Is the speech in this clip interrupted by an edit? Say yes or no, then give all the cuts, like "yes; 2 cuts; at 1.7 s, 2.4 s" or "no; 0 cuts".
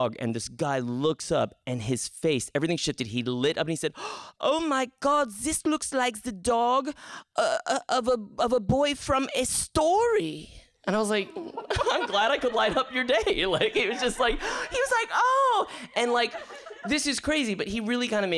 no; 0 cuts